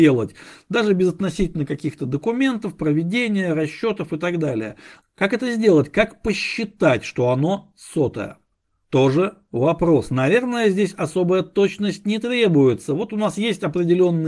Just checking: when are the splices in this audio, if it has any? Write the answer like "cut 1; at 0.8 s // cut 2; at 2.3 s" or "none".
cut 1; at 5.0 s // cut 2; at 8.8 s